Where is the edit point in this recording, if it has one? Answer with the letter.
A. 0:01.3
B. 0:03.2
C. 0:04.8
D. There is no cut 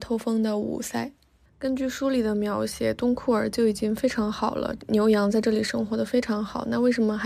C